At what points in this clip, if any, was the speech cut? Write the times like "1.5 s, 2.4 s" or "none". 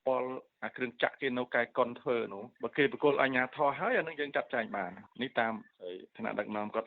none